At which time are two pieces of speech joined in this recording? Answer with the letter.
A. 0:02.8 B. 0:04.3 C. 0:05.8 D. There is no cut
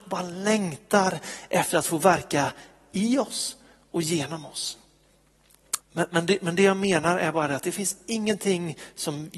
C